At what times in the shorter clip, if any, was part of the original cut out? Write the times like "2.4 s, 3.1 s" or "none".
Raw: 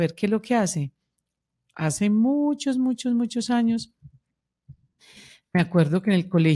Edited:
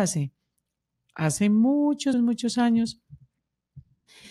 2.1 s

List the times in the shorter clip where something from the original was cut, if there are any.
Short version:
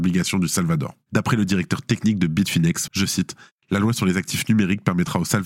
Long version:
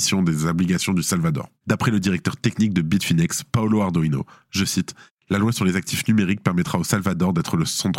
2.9 s

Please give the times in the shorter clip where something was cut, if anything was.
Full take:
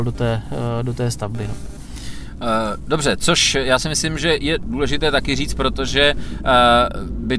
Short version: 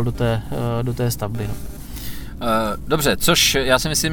none

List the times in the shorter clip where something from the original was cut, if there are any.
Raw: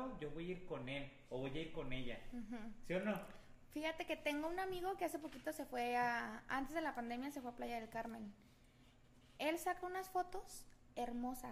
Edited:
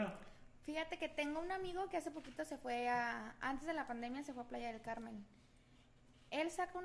none

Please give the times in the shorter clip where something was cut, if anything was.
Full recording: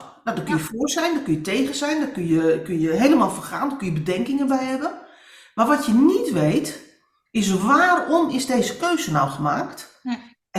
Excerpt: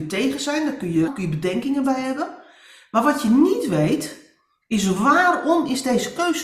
1.1 s

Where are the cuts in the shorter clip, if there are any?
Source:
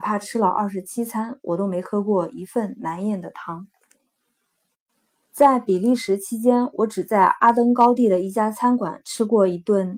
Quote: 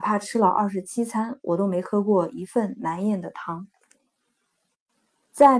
none

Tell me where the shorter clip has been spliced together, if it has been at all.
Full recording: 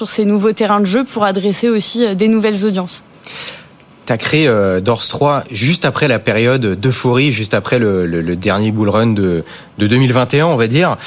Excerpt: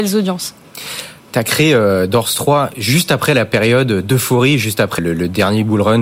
1.2 s, 5.0 s

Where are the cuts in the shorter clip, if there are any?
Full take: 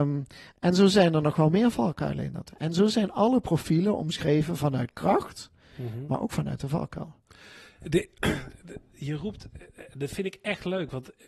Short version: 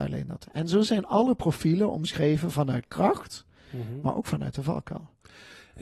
none

